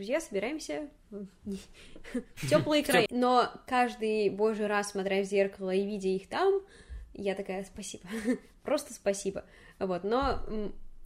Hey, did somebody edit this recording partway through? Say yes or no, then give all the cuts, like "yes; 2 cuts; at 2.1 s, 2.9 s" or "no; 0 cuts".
yes; 1 cut; at 3.1 s